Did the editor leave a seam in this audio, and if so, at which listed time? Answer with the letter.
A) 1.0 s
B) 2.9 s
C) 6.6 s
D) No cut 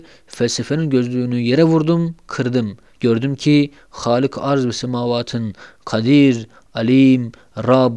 B